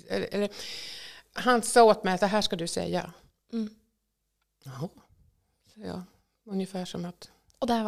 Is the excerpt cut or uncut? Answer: cut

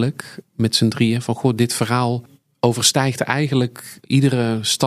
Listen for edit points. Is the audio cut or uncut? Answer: uncut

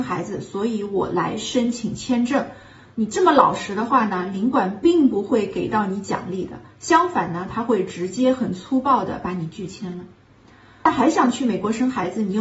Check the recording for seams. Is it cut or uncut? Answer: uncut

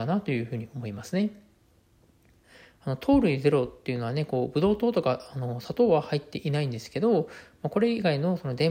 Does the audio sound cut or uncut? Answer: uncut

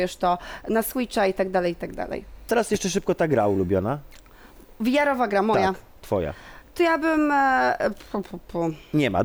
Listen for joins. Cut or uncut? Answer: cut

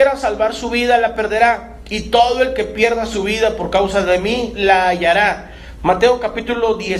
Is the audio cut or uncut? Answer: cut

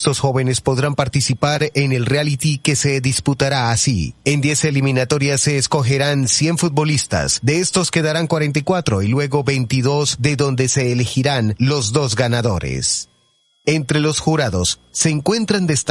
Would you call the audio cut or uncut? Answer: uncut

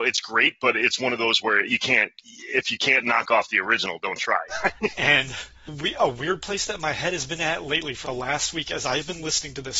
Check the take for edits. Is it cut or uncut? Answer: cut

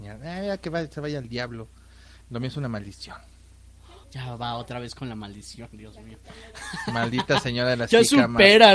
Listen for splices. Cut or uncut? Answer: cut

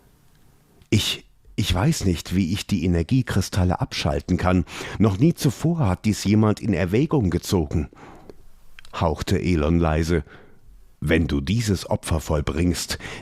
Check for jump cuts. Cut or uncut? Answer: cut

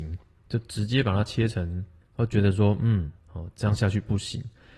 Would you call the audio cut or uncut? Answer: cut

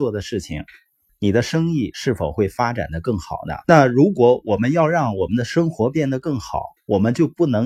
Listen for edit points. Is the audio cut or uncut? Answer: cut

